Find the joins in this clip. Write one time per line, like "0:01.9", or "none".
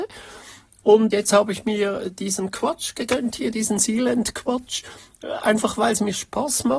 0:01.1